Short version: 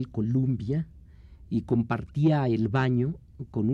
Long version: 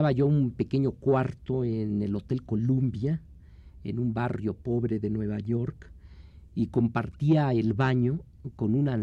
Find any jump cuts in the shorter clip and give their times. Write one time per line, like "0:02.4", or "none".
0:01.4